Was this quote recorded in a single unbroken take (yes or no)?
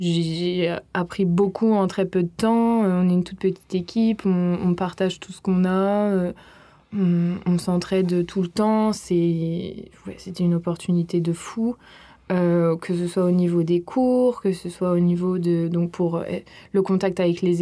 yes